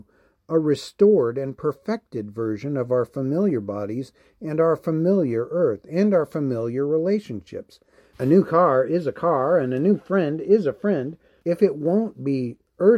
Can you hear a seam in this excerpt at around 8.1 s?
yes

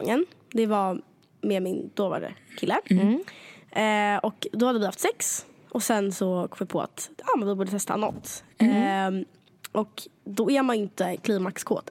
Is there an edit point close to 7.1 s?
yes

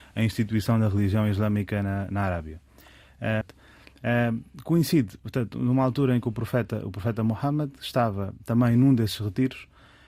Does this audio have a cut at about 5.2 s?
no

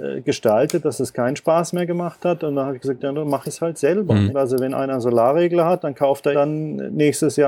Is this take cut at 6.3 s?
yes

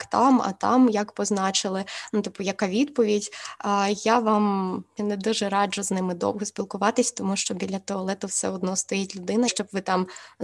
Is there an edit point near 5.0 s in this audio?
yes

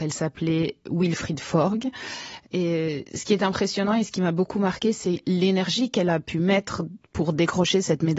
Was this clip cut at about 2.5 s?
no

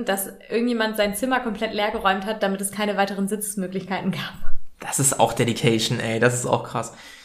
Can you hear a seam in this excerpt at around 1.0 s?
no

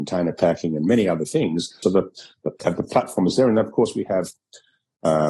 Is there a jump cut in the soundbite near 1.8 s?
yes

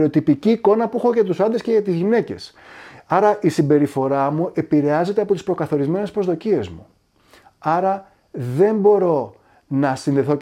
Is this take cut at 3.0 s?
no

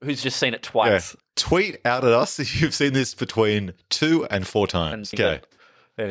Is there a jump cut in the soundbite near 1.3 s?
no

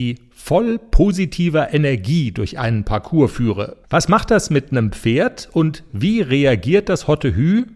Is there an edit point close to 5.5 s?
no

